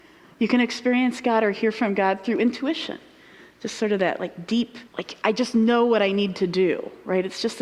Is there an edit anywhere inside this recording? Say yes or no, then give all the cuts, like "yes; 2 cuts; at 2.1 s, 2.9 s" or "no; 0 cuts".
yes; 1 cut; at 4.9 s